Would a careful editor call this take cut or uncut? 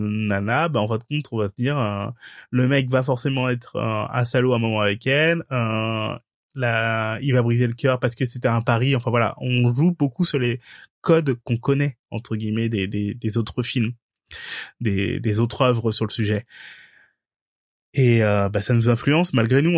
uncut